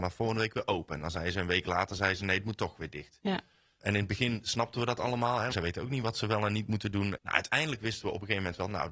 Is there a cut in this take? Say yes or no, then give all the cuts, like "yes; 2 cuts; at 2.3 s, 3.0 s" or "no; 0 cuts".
yes; 2 cuts; at 5.5 s, 7.2 s